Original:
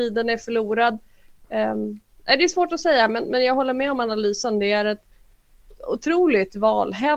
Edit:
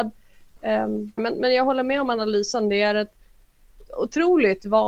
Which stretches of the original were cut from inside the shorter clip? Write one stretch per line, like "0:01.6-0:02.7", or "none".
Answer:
0:02.1-0:03.1

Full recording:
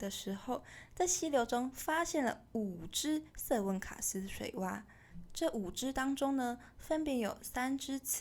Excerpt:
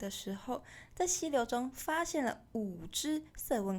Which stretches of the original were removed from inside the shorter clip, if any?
none

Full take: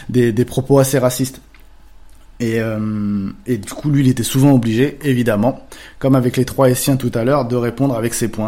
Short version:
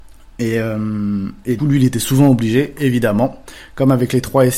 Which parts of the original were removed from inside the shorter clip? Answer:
0:03.6-0:03.8

